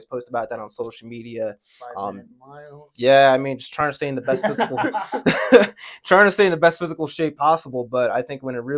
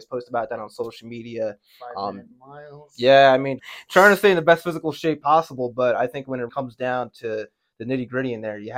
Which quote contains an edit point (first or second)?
second